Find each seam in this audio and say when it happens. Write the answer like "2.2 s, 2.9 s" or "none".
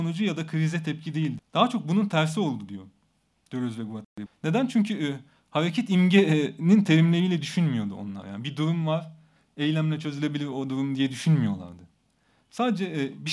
1.4 s, 4.3 s